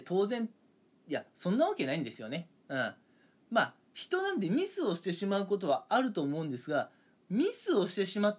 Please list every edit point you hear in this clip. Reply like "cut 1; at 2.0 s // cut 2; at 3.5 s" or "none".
none